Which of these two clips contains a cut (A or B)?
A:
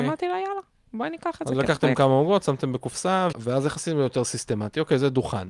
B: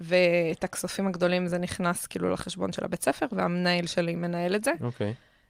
A